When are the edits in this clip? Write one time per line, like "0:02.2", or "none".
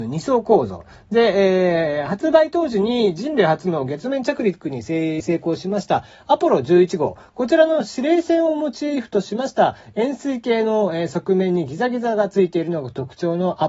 0:05.2